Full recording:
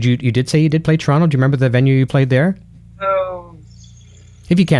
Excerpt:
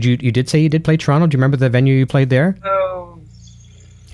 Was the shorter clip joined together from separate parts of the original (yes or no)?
yes